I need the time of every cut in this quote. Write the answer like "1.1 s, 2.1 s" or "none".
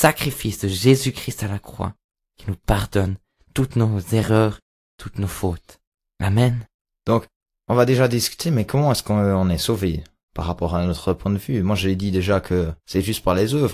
12.8 s